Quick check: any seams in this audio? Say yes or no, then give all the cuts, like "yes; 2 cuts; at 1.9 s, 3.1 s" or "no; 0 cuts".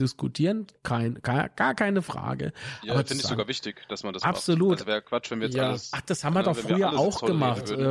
no; 0 cuts